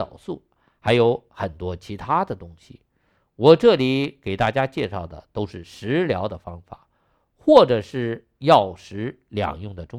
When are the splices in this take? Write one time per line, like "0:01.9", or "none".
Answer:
none